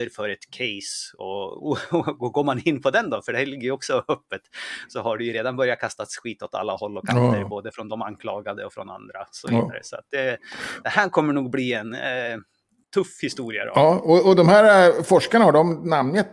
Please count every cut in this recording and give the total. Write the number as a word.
zero